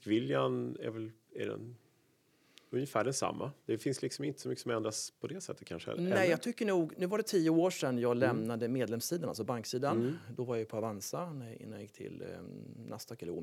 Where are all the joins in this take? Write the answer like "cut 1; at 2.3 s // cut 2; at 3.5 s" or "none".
none